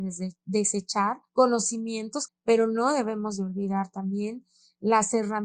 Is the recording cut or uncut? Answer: cut